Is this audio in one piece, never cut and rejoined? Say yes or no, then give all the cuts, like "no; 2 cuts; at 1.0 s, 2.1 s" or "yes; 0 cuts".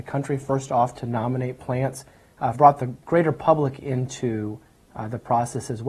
no; 1 cut; at 2.5 s